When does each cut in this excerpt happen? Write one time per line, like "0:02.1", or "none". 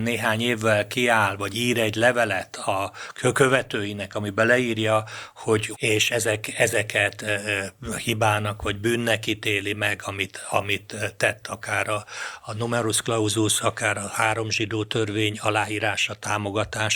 0:05.7